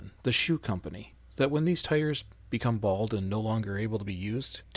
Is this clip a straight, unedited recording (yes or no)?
yes